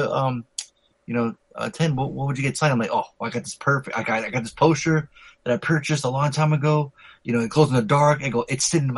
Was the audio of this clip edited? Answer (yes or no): no